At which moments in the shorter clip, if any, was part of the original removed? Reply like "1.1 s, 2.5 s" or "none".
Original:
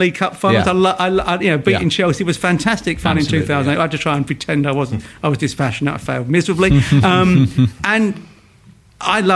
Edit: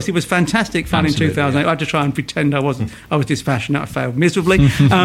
none